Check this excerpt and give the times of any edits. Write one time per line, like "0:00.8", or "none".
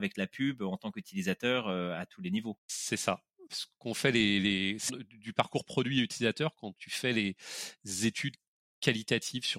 0:03.5
0:04.9